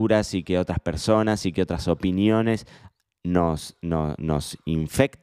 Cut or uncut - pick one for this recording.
uncut